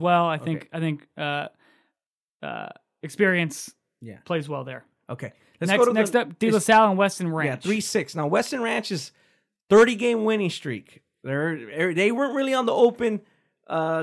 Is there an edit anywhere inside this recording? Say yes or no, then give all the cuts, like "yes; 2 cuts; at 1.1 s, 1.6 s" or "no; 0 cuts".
no; 0 cuts